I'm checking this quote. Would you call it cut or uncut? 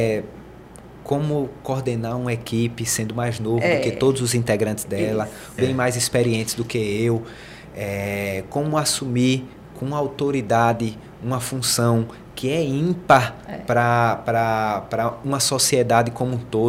cut